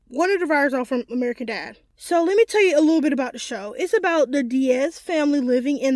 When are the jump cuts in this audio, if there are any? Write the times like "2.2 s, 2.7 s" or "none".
1.1 s